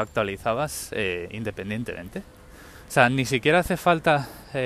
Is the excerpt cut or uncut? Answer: uncut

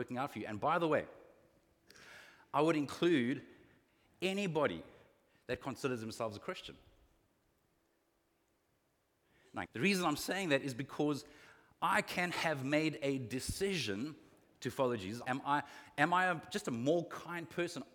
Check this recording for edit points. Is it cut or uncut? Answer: cut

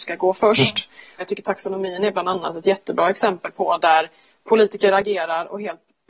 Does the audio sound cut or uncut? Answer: cut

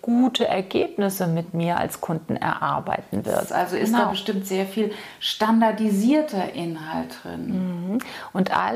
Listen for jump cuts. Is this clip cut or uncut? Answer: cut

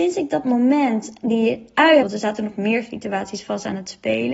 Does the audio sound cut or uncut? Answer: cut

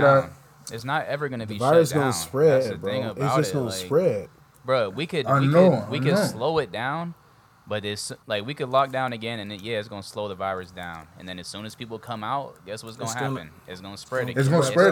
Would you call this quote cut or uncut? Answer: uncut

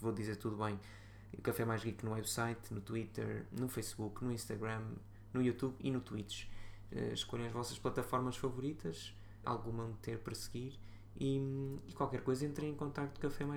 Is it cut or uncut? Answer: cut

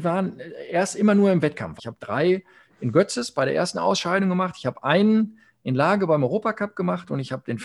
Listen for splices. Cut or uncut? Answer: cut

